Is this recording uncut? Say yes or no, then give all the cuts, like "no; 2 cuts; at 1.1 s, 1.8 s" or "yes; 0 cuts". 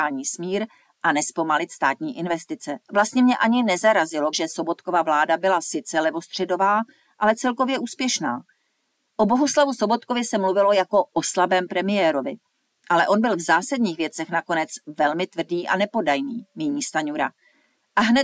no; 2 cuts; at 2.8 s, 4.3 s